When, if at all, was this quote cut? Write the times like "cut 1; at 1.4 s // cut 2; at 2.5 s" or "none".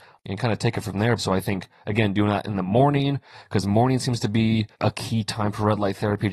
cut 1; at 1.2 s // cut 2; at 4.7 s